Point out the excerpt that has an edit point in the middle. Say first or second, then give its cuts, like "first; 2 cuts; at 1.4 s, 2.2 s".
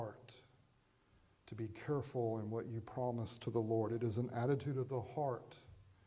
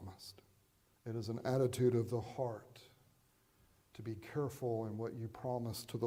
second; 1 cut; at 1.0 s